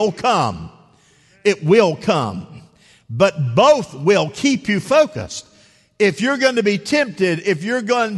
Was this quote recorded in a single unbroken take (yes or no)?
yes